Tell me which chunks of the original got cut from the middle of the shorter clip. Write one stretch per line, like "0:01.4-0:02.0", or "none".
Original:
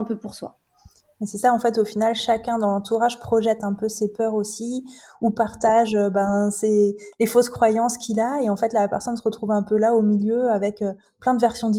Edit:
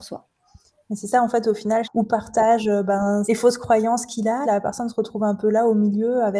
0:02.1-0:05.1
0:06.5-0:07.2
0:08.3-0:08.7